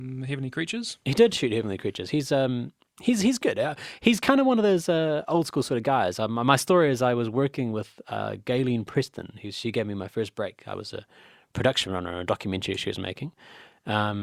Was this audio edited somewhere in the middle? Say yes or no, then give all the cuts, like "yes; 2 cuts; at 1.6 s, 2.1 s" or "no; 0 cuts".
no; 0 cuts